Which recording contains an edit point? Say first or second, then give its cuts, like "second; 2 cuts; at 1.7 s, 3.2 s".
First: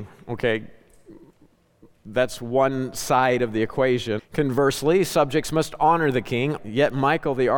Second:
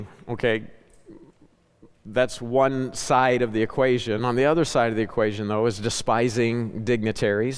first; 2 cuts; at 4.2 s, 6.6 s